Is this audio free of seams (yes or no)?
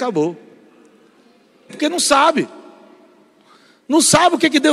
no